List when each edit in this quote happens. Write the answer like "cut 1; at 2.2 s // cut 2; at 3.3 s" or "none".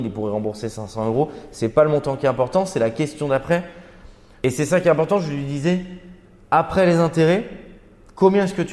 none